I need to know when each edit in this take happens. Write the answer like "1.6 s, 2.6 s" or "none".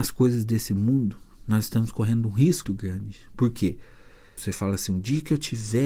2.6 s, 4.4 s